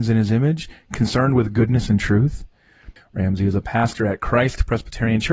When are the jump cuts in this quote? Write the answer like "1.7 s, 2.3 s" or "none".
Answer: 3.0 s